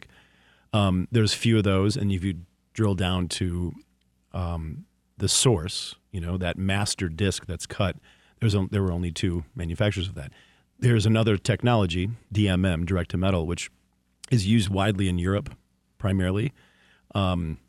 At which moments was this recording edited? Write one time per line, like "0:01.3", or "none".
none